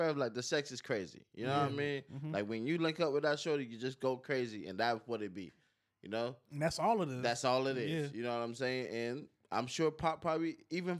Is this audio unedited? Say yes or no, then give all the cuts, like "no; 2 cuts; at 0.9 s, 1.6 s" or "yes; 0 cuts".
yes; 0 cuts